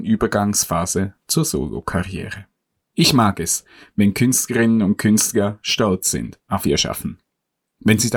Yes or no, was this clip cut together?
no